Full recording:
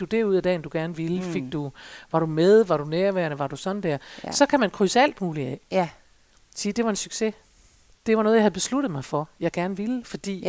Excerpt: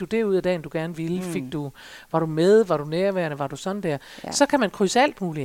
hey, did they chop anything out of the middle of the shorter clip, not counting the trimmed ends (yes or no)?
no